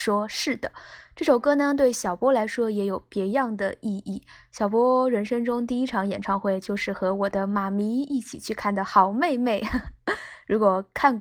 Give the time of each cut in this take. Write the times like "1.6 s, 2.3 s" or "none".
none